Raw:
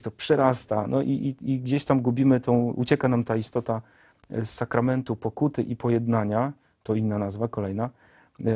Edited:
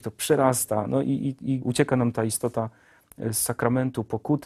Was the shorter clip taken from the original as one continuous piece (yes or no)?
no